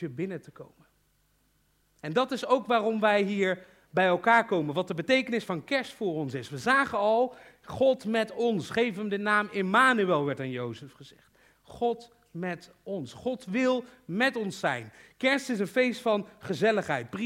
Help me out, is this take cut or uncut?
uncut